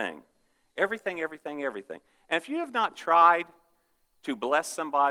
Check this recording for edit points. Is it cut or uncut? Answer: uncut